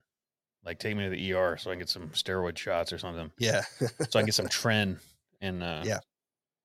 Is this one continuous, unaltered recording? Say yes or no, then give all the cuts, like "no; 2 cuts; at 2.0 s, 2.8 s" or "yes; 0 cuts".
yes; 0 cuts